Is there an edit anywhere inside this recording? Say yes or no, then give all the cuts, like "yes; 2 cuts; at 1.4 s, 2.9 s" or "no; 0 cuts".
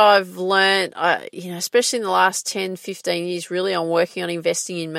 no; 0 cuts